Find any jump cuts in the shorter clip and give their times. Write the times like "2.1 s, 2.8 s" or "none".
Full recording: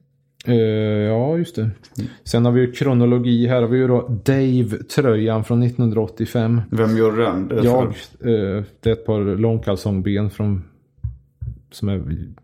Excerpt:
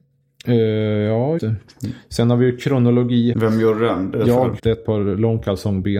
1.4 s, 3.3 s, 4.6 s